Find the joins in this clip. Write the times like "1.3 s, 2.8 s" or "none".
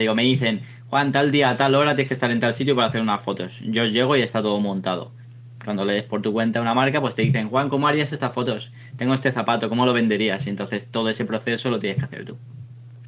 none